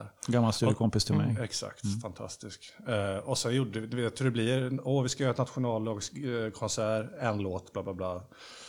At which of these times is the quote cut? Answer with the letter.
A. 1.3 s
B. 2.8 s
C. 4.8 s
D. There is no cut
D